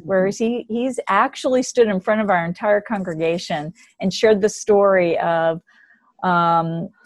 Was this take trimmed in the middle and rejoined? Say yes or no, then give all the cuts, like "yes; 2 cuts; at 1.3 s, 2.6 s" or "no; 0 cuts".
no; 0 cuts